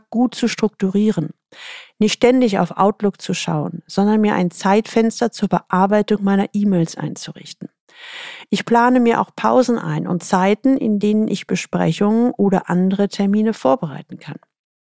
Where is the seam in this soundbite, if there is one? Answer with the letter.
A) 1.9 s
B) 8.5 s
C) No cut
C